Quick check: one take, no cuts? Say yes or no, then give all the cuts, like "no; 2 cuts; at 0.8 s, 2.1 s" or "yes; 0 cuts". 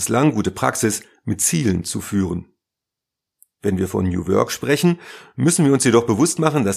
yes; 0 cuts